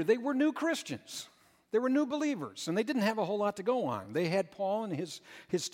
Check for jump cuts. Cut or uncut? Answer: uncut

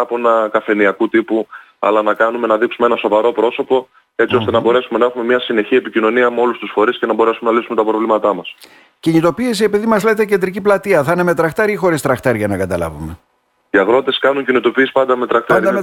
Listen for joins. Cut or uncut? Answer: uncut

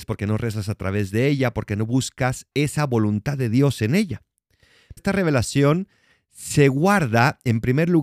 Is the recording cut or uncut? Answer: cut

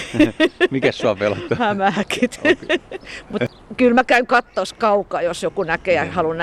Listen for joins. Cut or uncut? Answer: uncut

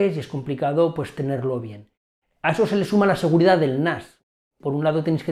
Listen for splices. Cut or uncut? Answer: uncut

